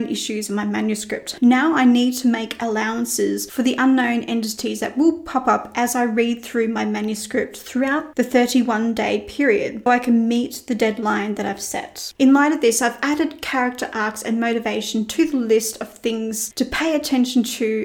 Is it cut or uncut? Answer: cut